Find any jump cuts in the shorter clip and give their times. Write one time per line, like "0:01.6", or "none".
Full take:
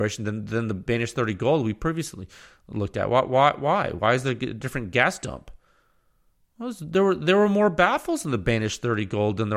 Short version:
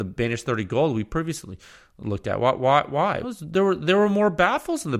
0:03.2